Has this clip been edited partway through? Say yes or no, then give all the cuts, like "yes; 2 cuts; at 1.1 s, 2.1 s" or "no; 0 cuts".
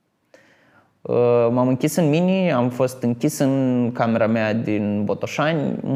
no; 0 cuts